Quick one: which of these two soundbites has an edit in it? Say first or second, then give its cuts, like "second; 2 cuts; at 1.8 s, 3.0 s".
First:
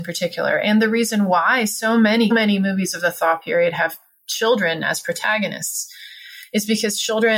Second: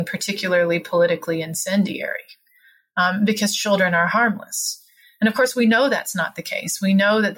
first; 1 cut; at 2.3 s